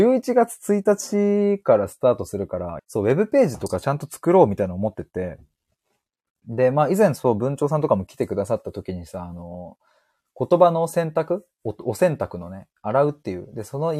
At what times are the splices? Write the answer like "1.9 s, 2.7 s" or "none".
2.8 s